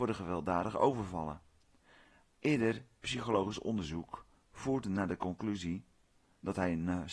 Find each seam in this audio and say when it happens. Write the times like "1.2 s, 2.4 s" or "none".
2.2 s